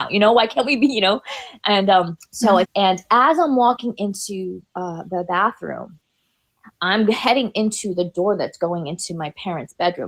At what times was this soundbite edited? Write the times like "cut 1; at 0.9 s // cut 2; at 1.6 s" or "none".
cut 1; at 2.6 s